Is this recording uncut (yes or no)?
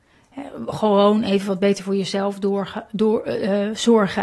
yes